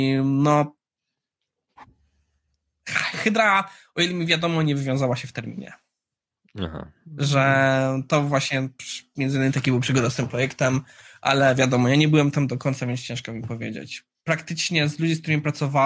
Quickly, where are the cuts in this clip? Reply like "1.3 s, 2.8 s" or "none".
none